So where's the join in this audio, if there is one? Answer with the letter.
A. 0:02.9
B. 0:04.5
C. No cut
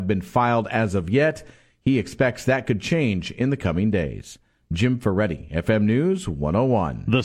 C